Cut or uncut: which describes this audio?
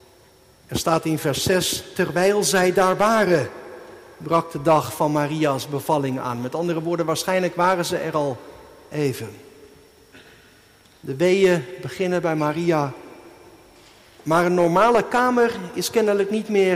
uncut